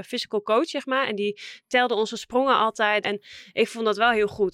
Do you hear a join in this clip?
yes; 1 cut; at 3.0 s

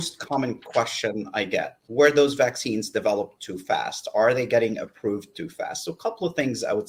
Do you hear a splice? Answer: no; 0 cuts

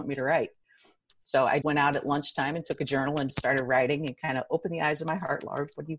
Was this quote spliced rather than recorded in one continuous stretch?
yes; 2 cuts; at 1.6 s, 3.3 s

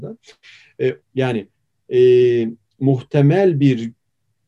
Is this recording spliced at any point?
yes; 1 cut; at 1.0 s

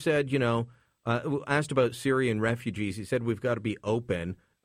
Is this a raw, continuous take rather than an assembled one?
yes; 0 cuts

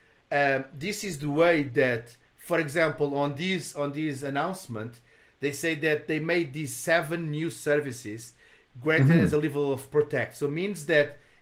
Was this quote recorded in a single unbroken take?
yes; 0 cuts

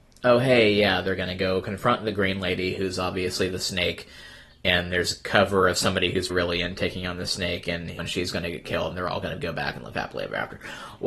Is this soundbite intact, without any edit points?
no; 2 cuts; at 6.3 s, 8.0 s

